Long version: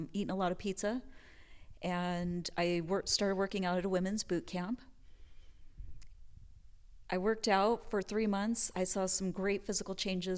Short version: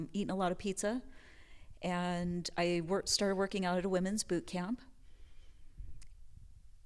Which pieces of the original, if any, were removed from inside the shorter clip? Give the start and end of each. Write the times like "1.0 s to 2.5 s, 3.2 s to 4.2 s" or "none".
none